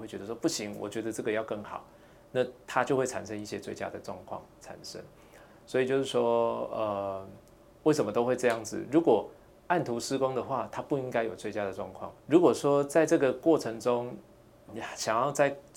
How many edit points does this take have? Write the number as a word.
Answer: two